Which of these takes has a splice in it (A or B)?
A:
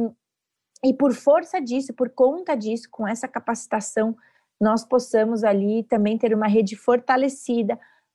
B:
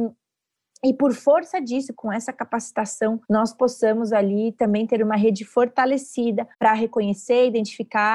B